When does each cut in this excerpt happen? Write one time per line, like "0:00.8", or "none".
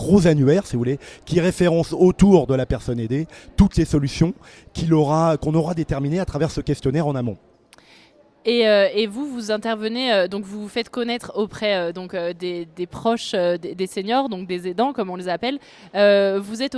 none